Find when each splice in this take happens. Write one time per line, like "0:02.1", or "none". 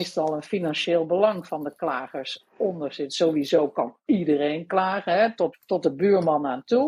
0:05.5

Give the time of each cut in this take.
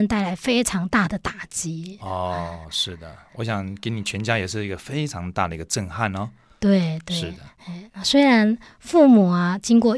none

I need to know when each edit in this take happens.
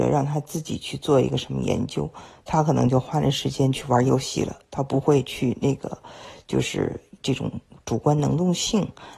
none

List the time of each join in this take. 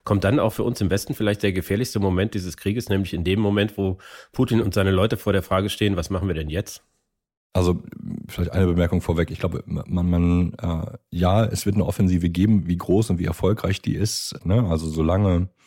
0:14.4

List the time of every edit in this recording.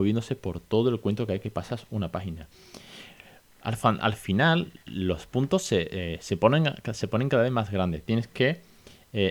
none

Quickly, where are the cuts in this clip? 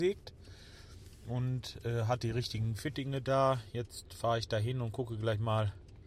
none

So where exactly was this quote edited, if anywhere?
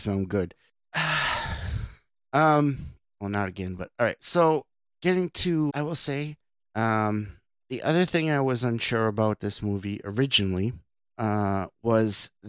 0:03.0
0:05.7

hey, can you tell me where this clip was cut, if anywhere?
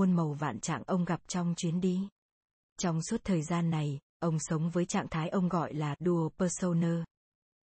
0:02.7

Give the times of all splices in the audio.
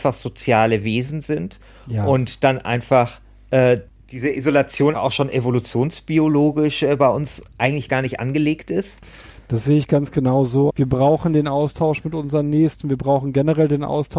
0:04.9
0:10.7

